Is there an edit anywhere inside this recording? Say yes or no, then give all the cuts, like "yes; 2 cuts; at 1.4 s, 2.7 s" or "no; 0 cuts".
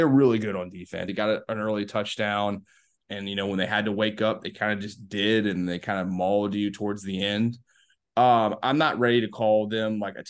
yes; 2 cuts; at 1.1 s, 3.0 s